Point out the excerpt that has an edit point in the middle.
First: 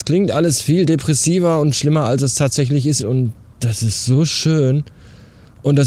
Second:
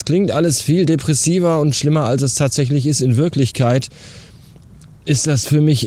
first; 1 cut; at 3.0 s

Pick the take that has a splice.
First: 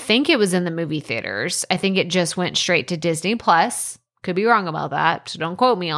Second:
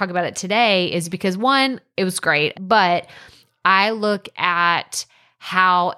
second; 1 cut; at 2.5 s

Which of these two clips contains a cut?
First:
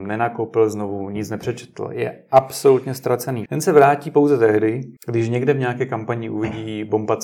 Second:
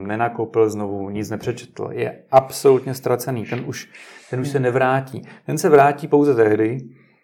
first; 2 cuts; at 3.5 s, 5.0 s

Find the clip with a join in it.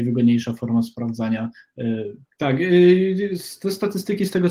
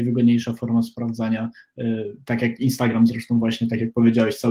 first; 1 cut; at 2.2 s

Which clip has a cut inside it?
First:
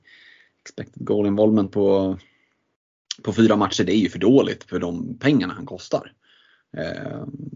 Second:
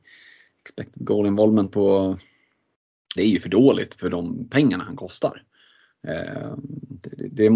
second; 1 cut; at 3.2 s

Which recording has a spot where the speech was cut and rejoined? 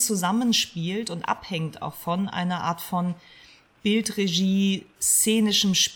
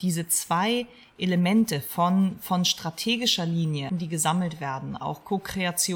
second; 1 cut; at 3.9 s

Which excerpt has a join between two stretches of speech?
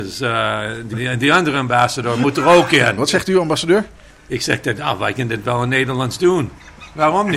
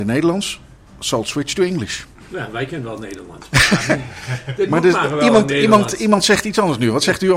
first; 2 cuts; at 0.9 s, 3.0 s

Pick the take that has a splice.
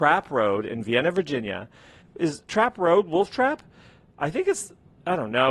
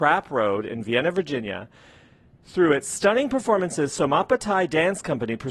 first; 1 cut; at 2.0 s

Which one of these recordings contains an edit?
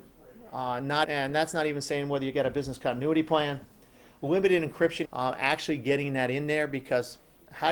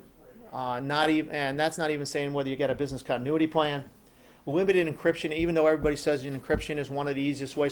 first; 2 cuts; at 1.0 s, 5.0 s

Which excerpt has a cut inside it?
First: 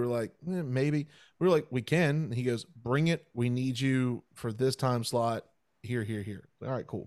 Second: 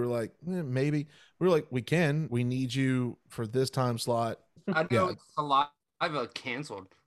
second; 2 cuts; at 2.3 s, 4.6 s

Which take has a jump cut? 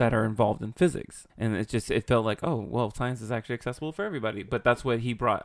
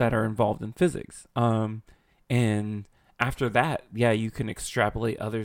first; 1 cut; at 1.3 s

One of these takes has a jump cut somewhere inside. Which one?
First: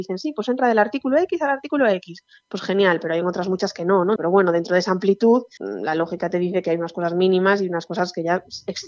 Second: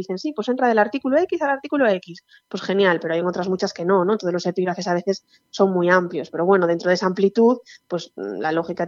first; 2 cuts; at 4.2 s, 5.6 s

